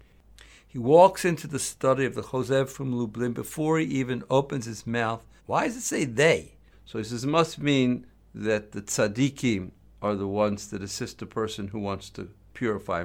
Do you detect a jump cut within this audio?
yes; 2 cuts; at 5.4 s, 6.7 s

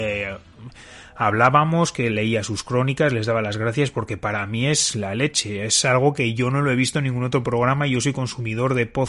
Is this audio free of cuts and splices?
yes; 0 cuts

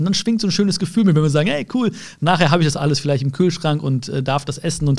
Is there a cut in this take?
no; 0 cuts

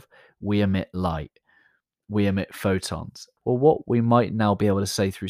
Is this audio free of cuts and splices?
no; 1 cut; at 3.4 s

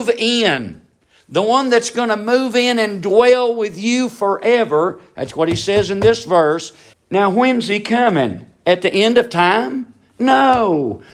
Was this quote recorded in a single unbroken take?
no; 1 cut; at 6.9 s

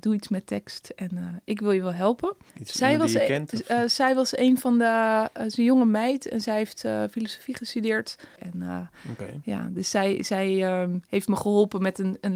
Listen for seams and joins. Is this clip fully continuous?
no; 2 cuts; at 2.5 s, 8.4 s

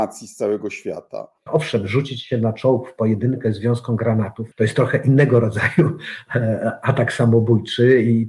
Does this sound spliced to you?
yes; 2 cuts; at 1.5 s, 4.5 s

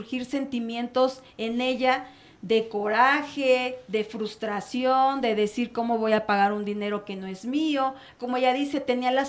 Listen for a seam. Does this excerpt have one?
yes; 1 cut; at 8.2 s

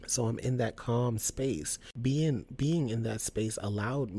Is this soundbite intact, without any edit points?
yes; 0 cuts

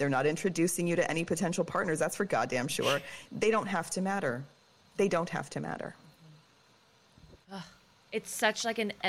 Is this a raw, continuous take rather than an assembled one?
no; 1 cut; at 7.4 s

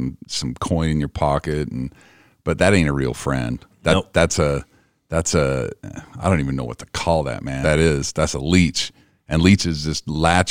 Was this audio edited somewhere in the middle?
yes; 1 cut; at 7.6 s

